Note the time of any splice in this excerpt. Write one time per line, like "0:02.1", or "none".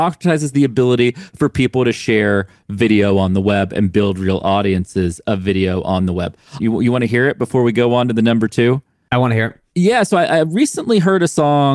0:06.6